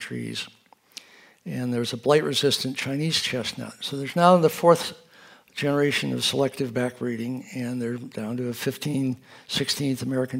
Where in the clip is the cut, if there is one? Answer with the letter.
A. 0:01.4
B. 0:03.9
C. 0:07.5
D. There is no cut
D